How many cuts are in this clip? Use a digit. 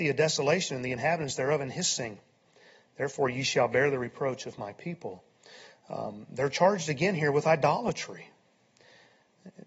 0